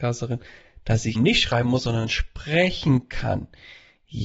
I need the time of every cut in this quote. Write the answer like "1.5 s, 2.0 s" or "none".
1.2 s

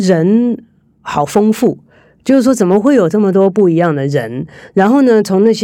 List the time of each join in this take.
none

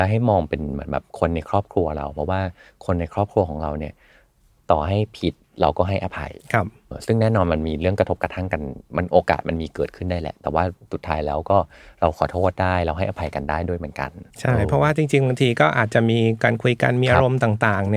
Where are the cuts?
6.9 s, 14.3 s

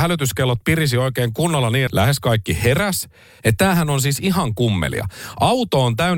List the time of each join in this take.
1.9 s, 3.4 s

